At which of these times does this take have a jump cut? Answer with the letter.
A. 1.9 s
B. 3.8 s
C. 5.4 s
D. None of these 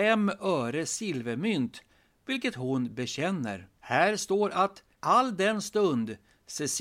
B